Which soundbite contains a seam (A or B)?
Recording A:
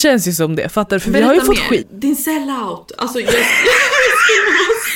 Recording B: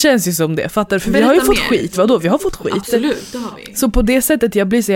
A